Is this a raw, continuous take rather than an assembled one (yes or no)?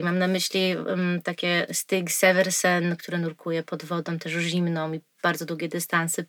no